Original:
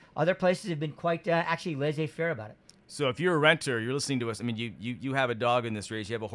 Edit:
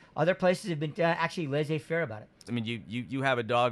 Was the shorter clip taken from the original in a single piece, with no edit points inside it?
no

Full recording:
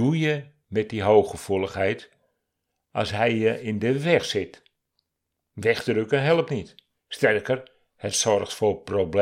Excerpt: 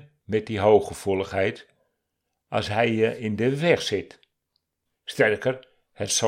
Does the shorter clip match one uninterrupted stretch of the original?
no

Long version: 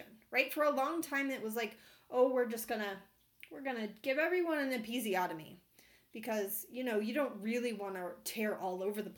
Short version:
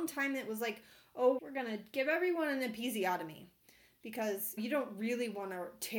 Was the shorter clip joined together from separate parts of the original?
yes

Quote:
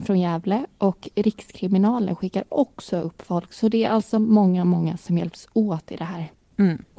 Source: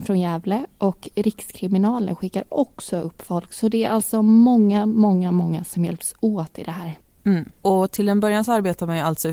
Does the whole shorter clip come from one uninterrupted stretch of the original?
no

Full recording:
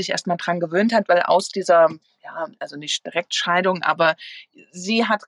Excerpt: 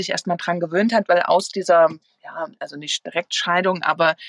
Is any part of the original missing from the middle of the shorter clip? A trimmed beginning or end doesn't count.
no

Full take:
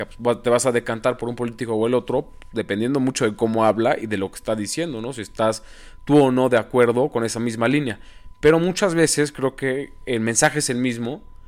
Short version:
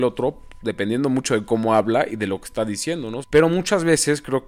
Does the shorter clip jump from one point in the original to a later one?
yes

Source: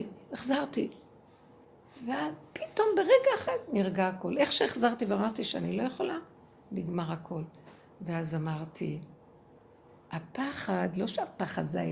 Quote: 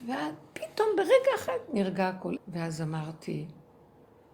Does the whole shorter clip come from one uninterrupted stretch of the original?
no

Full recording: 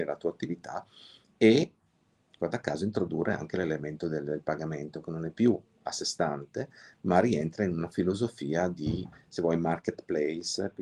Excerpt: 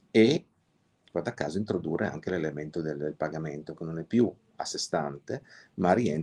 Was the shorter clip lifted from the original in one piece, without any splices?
yes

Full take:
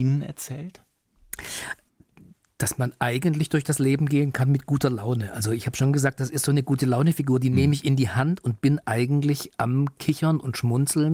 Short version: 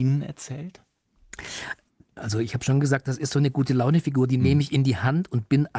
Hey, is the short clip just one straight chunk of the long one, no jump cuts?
no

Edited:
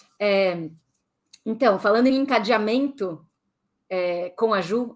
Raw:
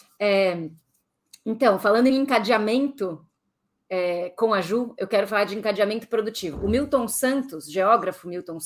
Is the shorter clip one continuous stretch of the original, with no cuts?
yes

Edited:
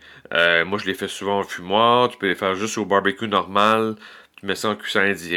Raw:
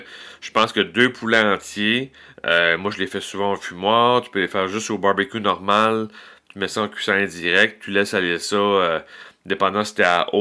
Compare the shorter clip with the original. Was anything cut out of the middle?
no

